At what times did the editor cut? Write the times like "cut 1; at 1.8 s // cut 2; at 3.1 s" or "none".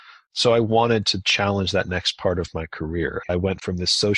cut 1; at 3.2 s